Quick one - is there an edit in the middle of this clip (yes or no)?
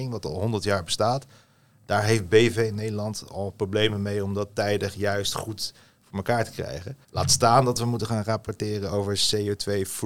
yes